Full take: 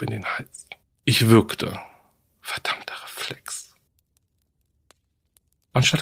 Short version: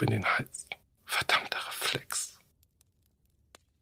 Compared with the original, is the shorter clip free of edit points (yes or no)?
no